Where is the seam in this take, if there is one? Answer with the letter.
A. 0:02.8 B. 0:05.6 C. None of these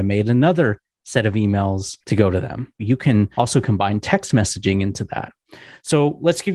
A